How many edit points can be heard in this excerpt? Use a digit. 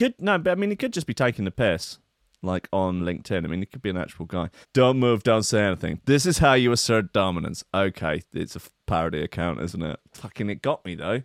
3